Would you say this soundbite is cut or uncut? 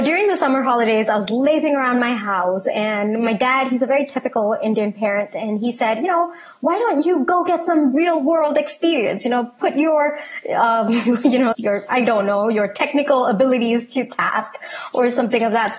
cut